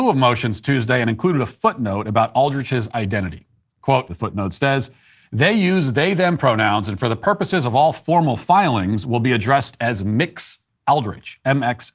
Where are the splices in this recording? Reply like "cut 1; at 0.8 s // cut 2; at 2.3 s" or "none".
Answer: cut 1; at 4.1 s